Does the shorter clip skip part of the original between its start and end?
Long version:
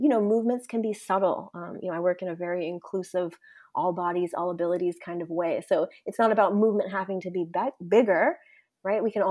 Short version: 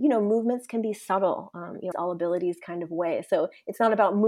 yes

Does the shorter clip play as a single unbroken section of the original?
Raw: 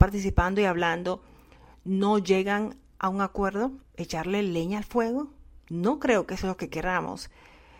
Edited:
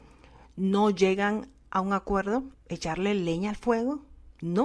yes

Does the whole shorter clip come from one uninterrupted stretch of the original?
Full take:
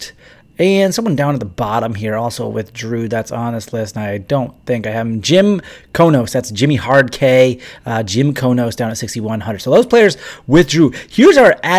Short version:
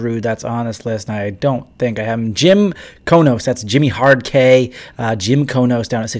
yes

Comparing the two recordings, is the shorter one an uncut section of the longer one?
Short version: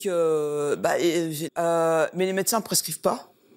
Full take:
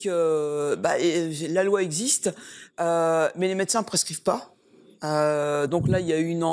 no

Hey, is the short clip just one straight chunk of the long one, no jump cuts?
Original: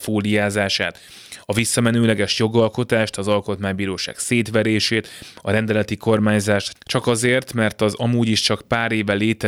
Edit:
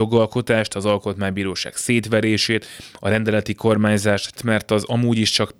no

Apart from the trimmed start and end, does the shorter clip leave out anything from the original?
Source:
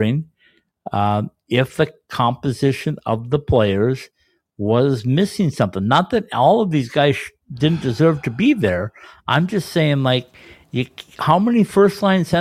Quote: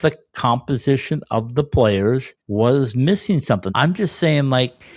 yes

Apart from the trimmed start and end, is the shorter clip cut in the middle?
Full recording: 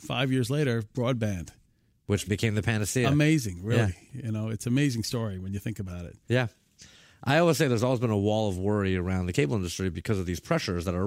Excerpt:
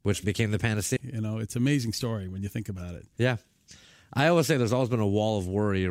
yes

